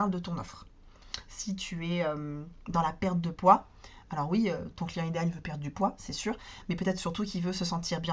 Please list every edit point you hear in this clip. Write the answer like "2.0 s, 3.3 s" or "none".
none